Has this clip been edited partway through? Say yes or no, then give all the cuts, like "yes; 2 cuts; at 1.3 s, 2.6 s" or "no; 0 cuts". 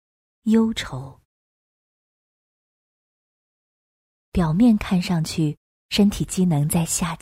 no; 0 cuts